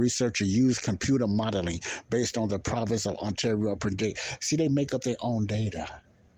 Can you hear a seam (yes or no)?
no